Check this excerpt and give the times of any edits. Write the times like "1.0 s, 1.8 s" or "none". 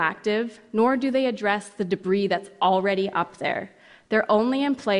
none